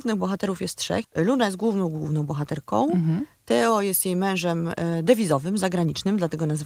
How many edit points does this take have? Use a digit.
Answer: 1